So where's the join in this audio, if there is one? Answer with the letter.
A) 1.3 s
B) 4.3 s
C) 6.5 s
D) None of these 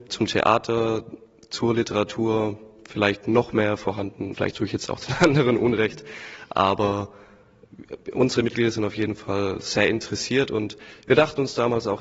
B